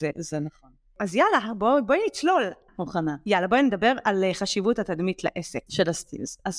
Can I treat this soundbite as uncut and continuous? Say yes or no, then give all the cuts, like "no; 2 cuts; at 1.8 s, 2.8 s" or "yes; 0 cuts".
no; 2 cuts; at 2.7 s, 5.7 s